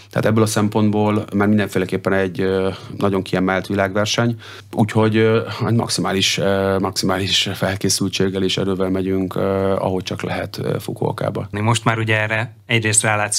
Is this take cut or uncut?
cut